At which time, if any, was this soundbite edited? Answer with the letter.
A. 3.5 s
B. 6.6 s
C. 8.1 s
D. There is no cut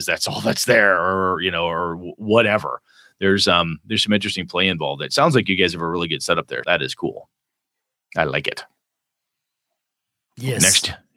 B